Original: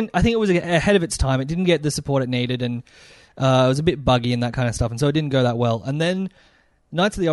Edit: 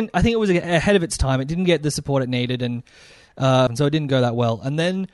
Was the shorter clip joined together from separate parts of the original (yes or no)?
yes